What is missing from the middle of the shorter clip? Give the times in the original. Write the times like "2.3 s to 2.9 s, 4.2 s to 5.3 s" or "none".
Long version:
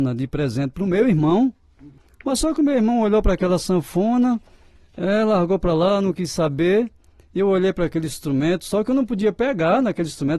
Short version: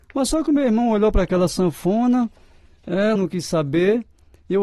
5.3 s to 6.0 s